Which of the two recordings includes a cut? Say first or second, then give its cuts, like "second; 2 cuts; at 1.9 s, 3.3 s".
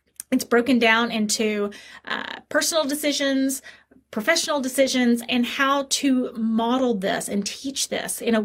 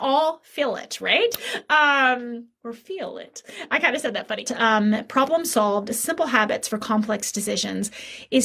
second; 1 cut; at 4.5 s